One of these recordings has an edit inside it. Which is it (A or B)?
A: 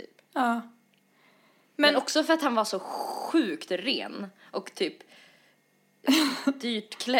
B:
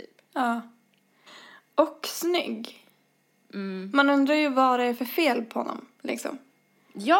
B